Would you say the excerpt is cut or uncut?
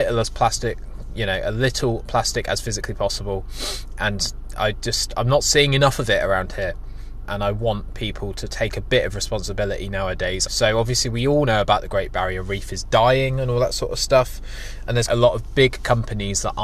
cut